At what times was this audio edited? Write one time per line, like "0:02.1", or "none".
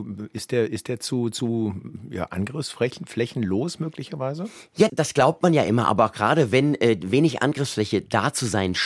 0:04.9